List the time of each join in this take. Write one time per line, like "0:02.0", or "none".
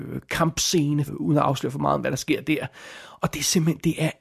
0:01.1

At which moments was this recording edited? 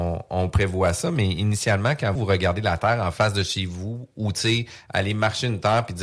0:02.2

